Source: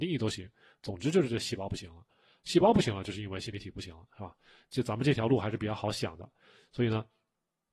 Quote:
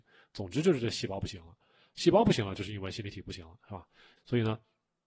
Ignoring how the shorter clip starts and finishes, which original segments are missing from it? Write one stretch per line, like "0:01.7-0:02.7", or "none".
0:04.7-0:06.6